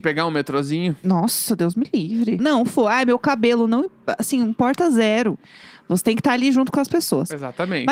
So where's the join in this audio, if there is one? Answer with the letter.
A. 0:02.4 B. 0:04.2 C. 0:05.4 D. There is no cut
A